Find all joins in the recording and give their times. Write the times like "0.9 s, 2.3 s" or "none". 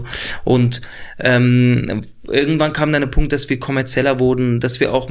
none